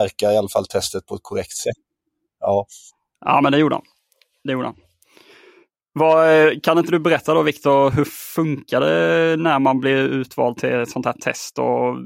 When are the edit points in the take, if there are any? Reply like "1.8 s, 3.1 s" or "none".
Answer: 7.9 s